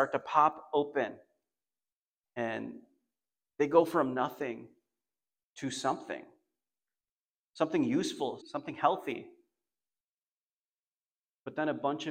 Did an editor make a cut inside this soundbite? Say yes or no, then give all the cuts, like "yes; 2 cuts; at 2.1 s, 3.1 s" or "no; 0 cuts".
yes; 1 cut; at 8.4 s